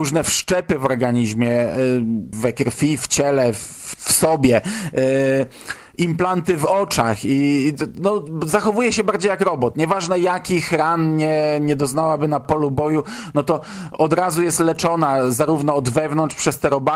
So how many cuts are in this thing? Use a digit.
2